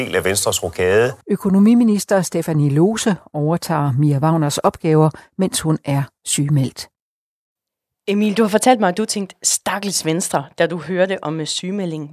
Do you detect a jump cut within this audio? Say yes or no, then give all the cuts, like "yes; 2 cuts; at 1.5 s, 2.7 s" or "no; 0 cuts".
no; 0 cuts